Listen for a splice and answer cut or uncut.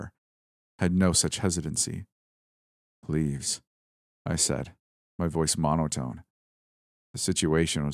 uncut